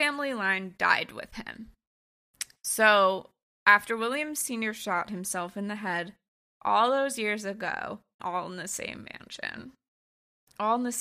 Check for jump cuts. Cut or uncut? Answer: cut